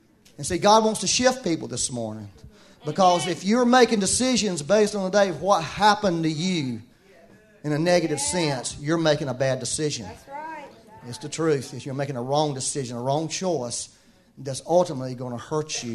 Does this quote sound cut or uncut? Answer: uncut